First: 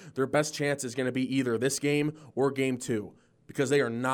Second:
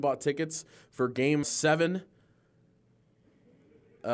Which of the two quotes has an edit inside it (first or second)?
second